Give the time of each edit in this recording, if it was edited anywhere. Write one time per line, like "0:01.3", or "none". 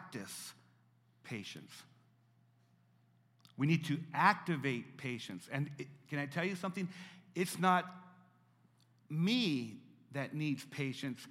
none